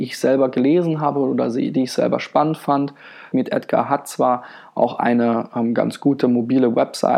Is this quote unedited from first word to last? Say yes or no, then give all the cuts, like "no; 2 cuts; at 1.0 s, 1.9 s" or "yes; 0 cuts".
no; 1 cut; at 3.3 s